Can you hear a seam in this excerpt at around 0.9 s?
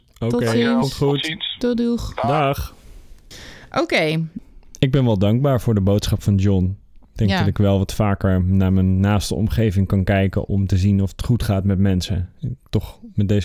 no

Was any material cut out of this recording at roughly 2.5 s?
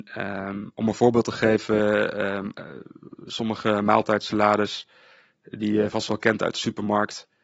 no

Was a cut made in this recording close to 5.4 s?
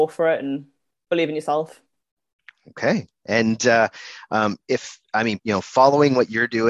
yes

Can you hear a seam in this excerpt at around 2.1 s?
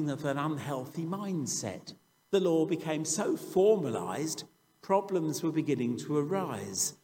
yes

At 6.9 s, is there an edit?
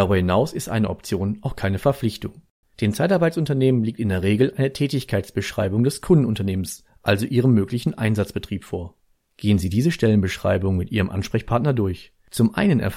no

